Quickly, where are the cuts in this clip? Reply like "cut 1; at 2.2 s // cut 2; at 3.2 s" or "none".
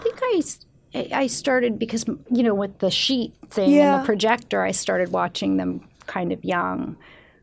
cut 1; at 2.3 s